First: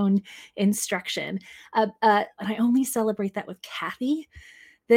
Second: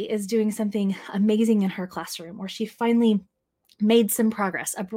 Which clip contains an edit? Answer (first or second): first